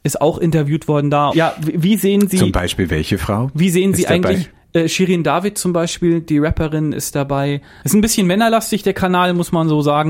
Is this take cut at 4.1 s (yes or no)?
no